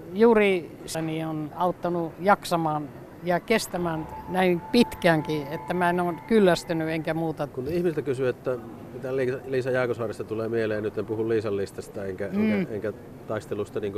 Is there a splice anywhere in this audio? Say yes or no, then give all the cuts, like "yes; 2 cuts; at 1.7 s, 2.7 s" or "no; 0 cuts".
yes; 2 cuts; at 0.9 s, 7.5 s